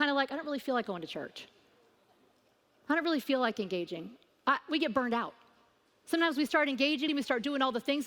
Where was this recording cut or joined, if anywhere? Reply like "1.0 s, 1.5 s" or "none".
7.1 s

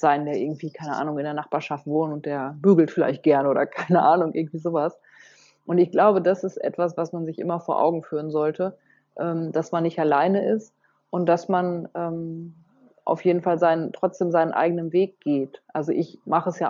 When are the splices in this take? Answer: none

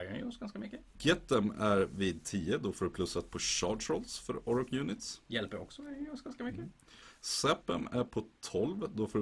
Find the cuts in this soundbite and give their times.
0.9 s

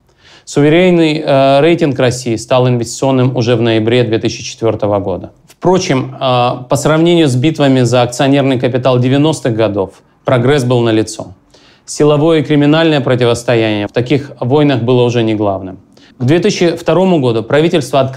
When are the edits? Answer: 5.4 s, 13.9 s, 16.1 s

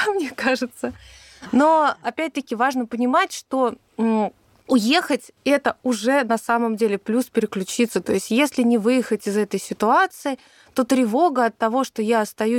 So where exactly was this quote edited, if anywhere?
none

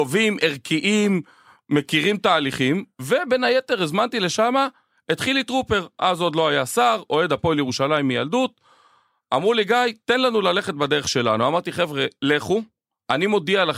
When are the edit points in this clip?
none

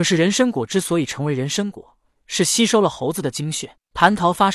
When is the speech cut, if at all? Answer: none

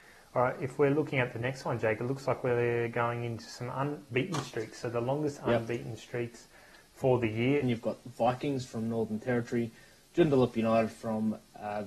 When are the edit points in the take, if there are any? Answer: 7.6 s

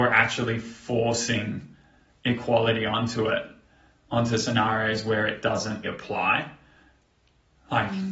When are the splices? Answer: 5.8 s

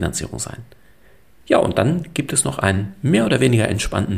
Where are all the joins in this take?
1.4 s

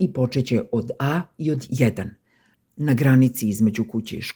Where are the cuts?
2.5 s

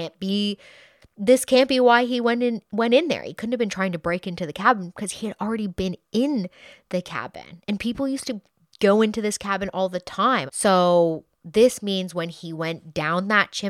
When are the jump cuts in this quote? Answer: 10.5 s

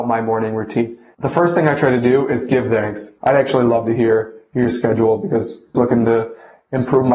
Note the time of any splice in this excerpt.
1.1 s, 3.2 s, 5.7 s

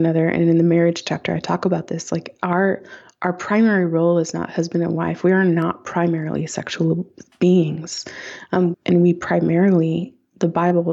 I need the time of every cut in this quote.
8.7 s

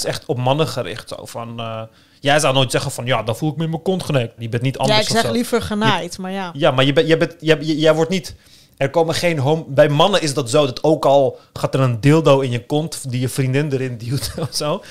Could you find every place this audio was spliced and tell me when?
4.4 s

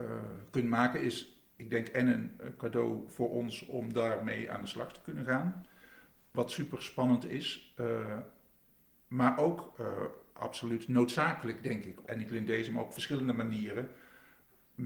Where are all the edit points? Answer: 12.0 s

